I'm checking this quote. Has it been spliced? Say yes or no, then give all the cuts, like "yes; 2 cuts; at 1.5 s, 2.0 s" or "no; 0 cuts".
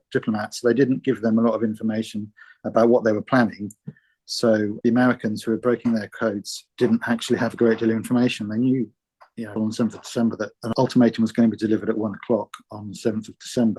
yes; 1 cut; at 9.6 s